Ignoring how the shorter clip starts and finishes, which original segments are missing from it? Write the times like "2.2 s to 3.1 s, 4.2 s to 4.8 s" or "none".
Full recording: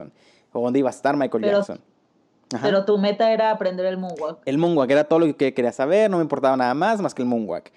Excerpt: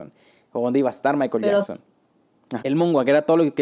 2.6 s to 4.4 s